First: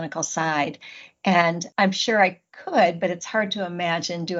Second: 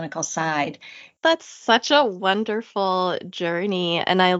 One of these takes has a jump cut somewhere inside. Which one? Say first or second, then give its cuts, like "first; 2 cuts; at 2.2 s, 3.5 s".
second; 1 cut; at 1.2 s